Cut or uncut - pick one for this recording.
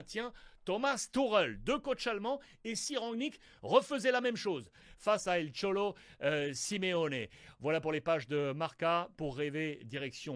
uncut